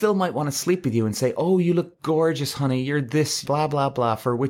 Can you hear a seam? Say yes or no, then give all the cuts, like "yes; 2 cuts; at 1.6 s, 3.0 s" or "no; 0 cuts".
yes; 1 cut; at 3.4 s